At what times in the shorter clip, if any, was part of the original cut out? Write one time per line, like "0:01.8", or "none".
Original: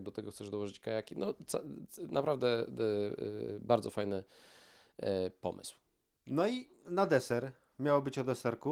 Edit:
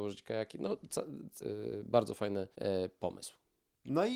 0:01.4
0:02.5